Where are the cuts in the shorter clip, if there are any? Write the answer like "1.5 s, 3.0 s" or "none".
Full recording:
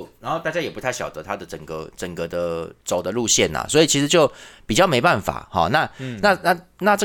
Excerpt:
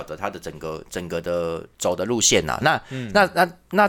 2.6 s